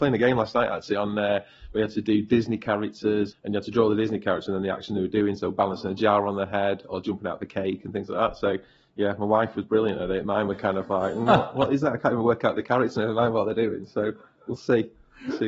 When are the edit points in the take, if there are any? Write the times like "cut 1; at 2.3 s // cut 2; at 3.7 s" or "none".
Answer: cut 1; at 3.3 s